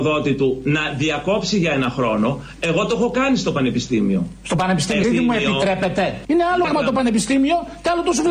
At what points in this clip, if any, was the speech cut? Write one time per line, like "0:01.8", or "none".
0:05.0
0:06.6